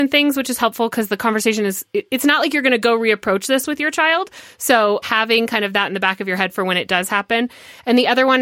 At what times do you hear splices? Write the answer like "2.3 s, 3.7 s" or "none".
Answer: 5.0 s